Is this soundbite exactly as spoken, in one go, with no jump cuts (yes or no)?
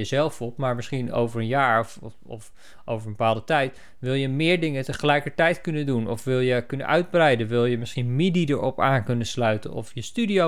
yes